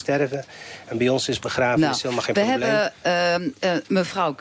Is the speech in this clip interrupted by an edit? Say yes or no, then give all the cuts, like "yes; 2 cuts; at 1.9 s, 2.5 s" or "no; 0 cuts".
no; 0 cuts